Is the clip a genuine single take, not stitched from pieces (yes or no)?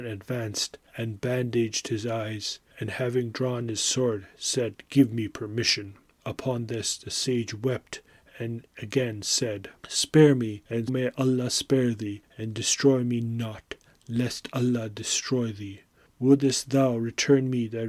no